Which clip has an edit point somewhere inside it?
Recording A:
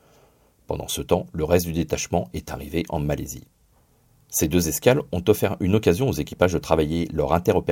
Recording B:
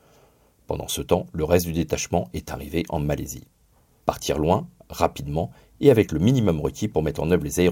B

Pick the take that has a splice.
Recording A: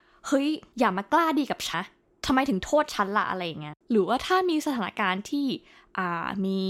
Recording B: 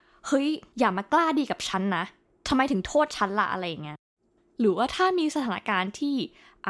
A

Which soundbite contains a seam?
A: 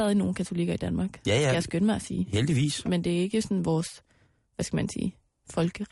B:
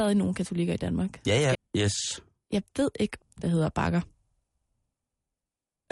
B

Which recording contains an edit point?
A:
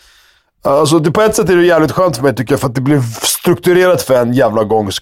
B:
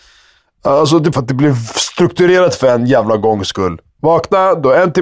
B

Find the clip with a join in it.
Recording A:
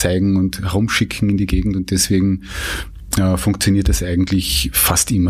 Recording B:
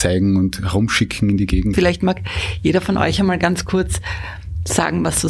B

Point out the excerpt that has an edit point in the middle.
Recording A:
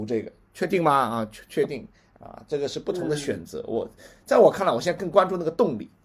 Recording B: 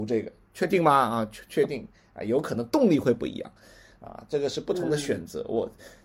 A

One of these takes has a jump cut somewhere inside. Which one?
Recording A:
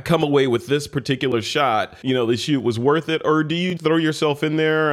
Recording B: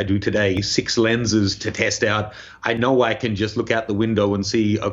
A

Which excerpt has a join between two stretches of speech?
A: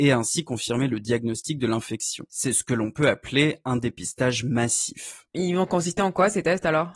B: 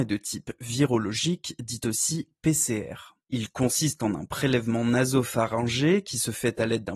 A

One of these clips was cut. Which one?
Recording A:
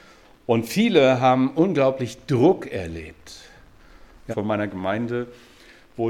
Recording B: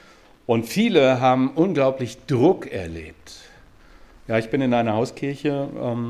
A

